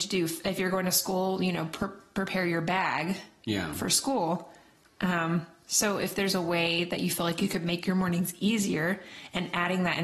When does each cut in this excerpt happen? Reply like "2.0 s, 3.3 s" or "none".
none